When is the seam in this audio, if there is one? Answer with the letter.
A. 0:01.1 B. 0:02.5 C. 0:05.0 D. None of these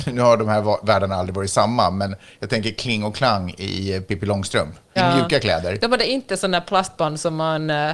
C